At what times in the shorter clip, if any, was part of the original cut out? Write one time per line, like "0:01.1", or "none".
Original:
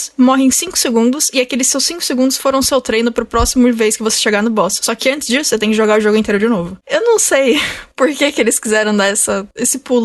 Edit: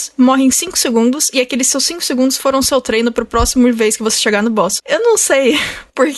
0:04.8